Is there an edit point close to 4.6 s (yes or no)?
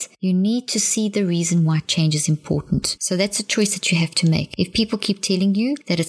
no